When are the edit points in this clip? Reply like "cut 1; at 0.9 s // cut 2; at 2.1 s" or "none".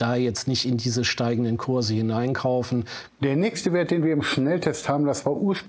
cut 1; at 3.1 s